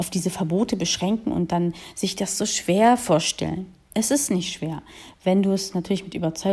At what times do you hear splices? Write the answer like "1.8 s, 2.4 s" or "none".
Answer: none